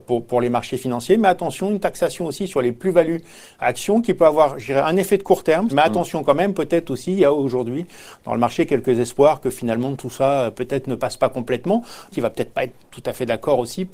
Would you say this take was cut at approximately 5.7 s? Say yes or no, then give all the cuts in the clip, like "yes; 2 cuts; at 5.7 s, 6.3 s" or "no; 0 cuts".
yes; 2 cuts; at 5.7 s, 12.1 s